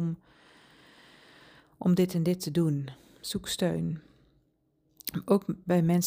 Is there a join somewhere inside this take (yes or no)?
no